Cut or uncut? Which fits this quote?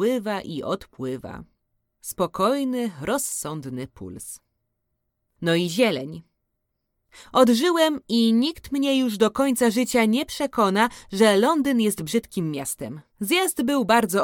cut